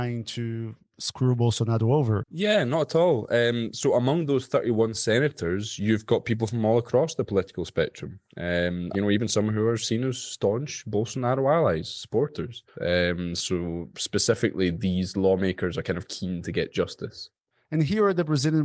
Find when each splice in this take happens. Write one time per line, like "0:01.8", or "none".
0:08.9
0:12.7